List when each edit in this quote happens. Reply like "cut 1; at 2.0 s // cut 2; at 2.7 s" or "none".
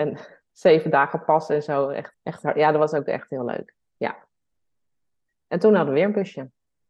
cut 1; at 2.1 s